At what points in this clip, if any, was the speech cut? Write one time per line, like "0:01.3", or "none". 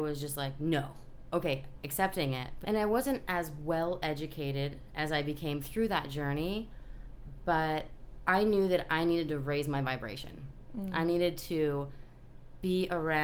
0:01.3
0:02.6